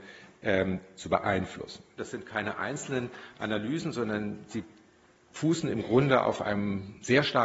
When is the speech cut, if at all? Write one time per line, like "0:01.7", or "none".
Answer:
0:02.0